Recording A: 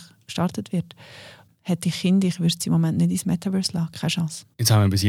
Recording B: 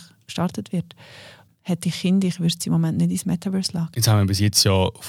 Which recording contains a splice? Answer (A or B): B